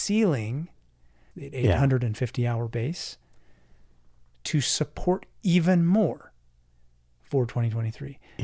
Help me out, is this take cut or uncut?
cut